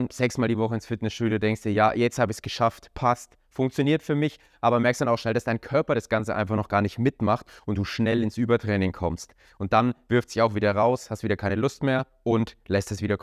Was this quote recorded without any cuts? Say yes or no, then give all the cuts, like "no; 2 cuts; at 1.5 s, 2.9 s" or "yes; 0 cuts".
yes; 0 cuts